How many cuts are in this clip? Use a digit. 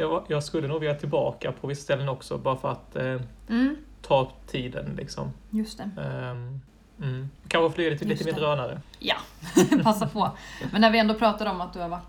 0